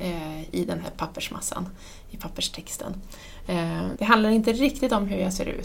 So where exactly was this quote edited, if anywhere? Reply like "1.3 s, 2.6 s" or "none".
4.0 s